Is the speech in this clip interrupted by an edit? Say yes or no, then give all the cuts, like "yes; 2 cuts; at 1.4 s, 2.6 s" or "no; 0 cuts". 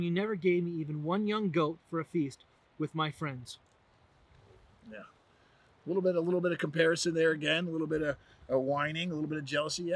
no; 0 cuts